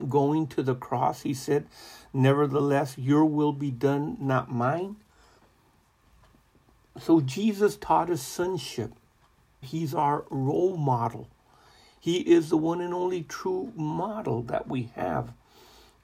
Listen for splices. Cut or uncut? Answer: cut